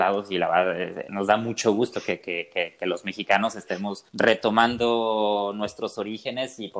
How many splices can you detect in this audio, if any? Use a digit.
2